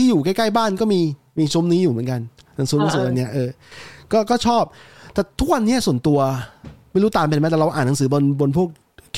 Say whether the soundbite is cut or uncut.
uncut